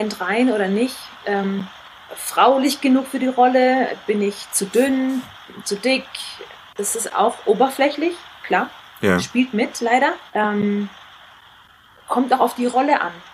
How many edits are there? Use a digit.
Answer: 2